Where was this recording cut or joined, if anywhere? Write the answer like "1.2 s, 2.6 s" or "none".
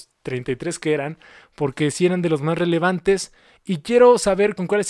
none